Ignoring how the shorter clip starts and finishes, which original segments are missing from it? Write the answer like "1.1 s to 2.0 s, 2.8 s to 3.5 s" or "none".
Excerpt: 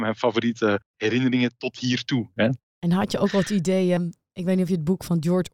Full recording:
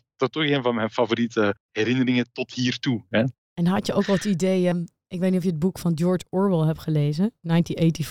none